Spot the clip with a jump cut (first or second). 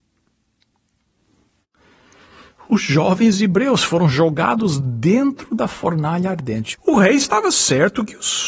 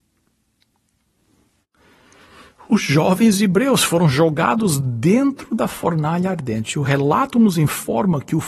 first